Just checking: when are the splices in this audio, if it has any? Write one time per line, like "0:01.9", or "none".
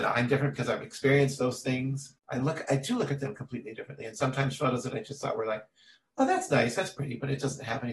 none